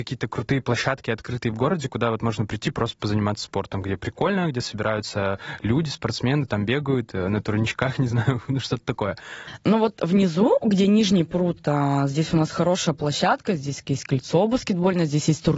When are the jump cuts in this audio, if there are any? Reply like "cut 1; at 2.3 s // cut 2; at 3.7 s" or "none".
cut 1; at 9.6 s